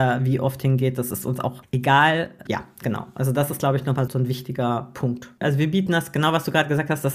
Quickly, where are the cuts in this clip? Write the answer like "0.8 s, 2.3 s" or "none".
2.5 s, 4.1 s, 5.4 s